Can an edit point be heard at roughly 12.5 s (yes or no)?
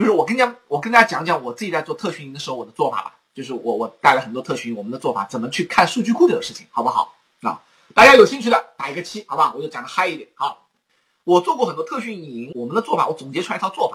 yes